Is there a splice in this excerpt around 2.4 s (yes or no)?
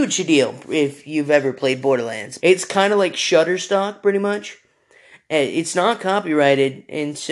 yes